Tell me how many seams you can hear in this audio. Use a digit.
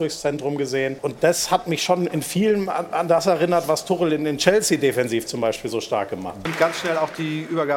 2